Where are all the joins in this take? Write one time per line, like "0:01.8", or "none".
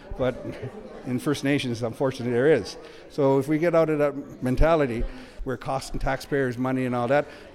none

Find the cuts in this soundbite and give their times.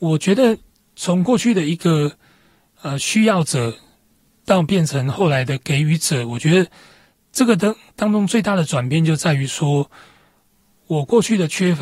none

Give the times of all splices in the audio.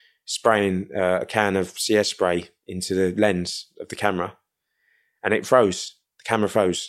none

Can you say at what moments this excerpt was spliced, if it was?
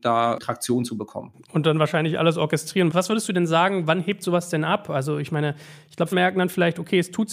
0:02.9
0:06.1

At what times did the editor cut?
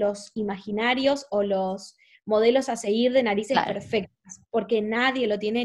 none

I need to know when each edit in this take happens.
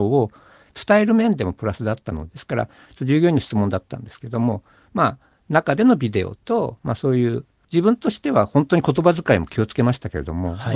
0:02.3

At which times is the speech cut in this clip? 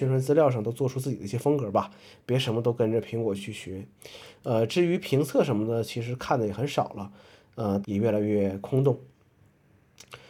0:03.4
0:07.8

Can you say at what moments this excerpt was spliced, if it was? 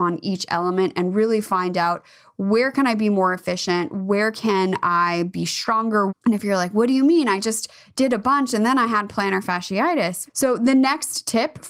0:06.1
0:10.3

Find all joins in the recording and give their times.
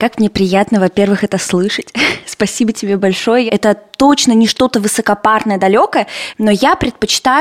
0:03.5

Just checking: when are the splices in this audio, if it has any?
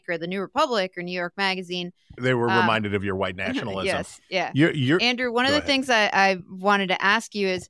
0:02.2

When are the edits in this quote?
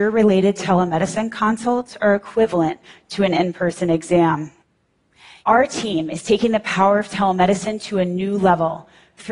0:05.4

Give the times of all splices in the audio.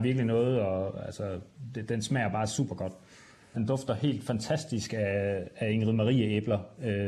0:03.5

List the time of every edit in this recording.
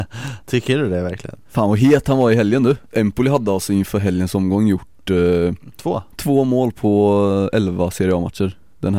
0:06.1

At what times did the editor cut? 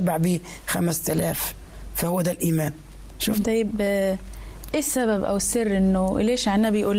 0:03.4

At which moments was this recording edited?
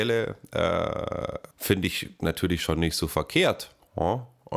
0:01.5

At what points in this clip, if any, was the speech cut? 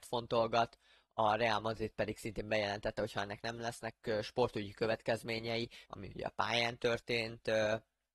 0:05.9

